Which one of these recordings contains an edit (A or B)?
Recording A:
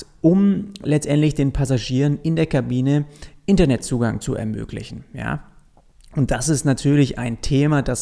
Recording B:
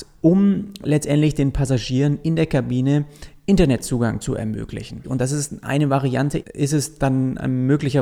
B